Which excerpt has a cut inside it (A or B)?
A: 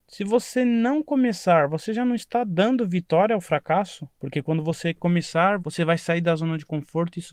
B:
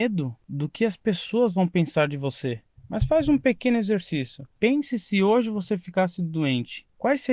A